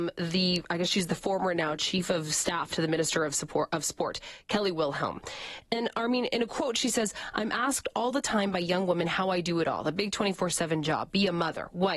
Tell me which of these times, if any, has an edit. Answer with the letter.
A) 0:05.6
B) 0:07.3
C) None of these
C